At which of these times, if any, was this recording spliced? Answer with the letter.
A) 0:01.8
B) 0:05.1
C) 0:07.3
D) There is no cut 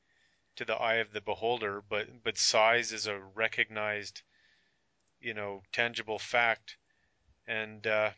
D